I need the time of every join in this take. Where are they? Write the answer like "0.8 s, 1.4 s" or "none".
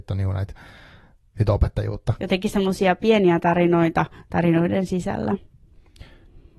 2.2 s